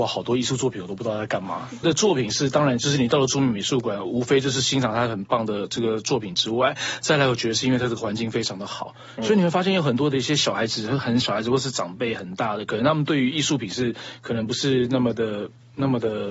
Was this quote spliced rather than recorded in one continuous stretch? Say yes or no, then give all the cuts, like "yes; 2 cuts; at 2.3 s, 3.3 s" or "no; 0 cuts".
yes; 2 cuts; at 1.8 s, 11.2 s